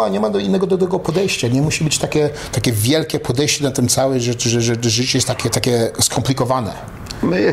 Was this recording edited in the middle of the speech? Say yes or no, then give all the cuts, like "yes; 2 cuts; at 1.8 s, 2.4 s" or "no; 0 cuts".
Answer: yes; 1 cut; at 5.5 s